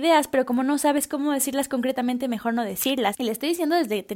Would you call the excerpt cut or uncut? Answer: uncut